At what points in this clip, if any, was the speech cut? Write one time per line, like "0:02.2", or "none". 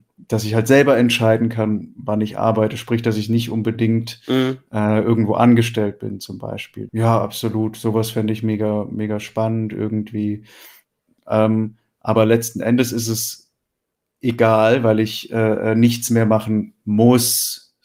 0:06.9
0:11.2